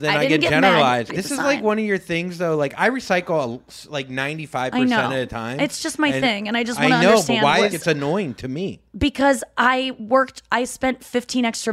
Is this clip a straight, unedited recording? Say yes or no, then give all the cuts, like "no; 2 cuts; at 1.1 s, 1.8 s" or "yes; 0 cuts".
no; 2 cuts; at 1.1 s, 7.7 s